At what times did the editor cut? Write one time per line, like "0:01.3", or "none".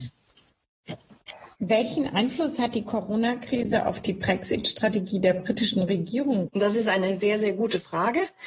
0:01.6
0:06.5

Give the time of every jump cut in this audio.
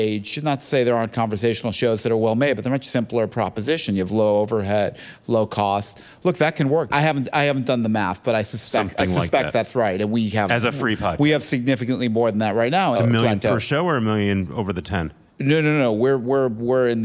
0:06.9
0:12.9

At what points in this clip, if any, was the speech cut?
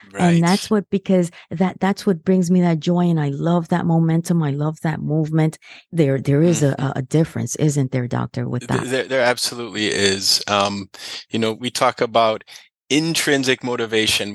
0:11.6

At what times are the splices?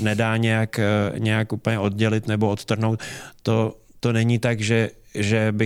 none

